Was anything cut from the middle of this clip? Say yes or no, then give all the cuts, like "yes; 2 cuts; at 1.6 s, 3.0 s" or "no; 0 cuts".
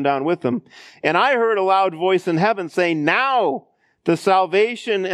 no; 0 cuts